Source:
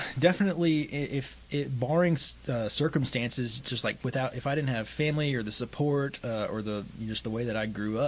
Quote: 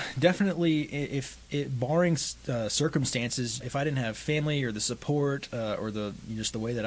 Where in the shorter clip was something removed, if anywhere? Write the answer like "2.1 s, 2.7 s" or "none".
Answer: 3.6 s